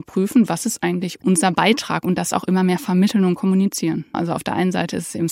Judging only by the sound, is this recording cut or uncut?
cut